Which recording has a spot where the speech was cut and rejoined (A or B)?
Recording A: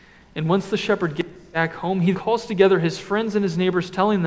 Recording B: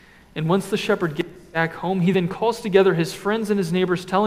A